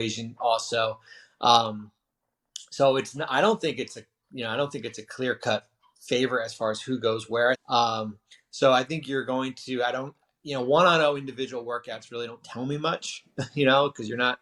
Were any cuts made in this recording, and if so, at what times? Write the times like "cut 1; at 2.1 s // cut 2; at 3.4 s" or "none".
cut 1; at 7.5 s